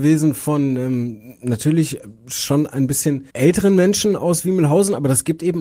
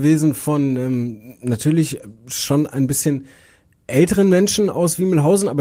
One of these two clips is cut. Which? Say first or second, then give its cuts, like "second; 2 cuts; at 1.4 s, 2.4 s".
first; 1 cut; at 3.3 s